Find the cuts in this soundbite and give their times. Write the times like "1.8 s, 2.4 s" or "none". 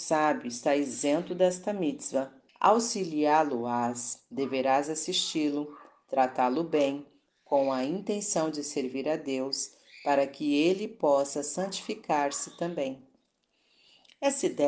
2.5 s